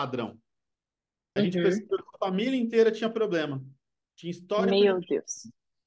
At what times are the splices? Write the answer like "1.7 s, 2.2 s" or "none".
1.4 s